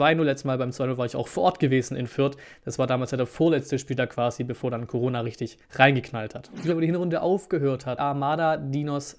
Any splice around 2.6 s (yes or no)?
no